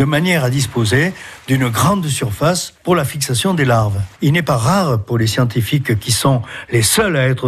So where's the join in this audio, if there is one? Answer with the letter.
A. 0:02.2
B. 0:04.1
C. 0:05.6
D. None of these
B